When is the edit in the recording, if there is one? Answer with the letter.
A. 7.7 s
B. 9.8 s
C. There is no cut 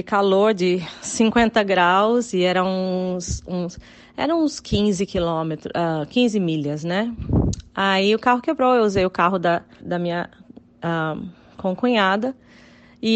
B